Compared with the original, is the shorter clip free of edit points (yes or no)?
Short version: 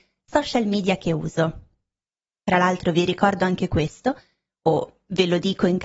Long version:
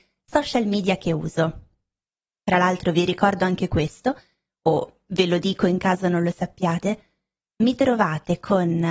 yes